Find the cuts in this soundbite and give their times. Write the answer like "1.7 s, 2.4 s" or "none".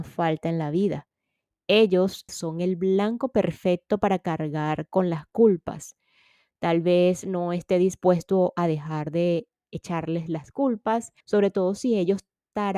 2.3 s, 11.2 s